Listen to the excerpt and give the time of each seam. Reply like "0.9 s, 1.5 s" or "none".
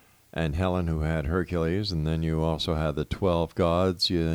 none